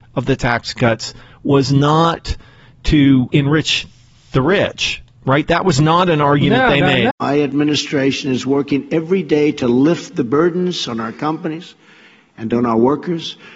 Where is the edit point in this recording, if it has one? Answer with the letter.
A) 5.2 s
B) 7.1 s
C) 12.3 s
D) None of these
B